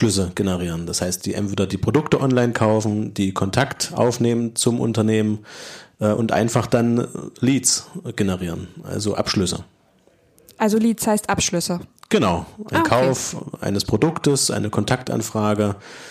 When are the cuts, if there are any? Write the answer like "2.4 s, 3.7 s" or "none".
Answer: none